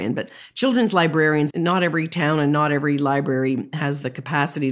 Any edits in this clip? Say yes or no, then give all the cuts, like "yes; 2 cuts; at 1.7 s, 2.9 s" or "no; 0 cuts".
yes; 1 cut; at 1.5 s